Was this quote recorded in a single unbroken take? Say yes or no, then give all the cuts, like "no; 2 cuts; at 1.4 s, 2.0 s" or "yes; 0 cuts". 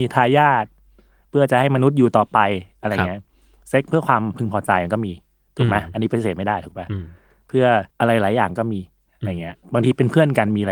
no; 1 cut; at 7.9 s